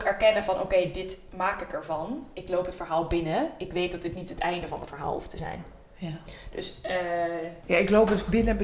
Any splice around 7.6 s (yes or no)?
yes